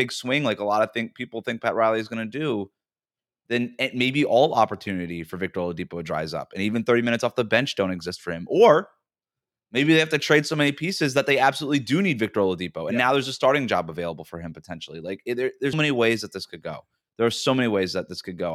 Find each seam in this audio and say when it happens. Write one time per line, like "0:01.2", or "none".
0:15.7